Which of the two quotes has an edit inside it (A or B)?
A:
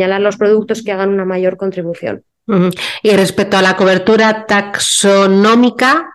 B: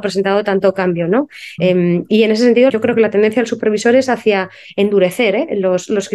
B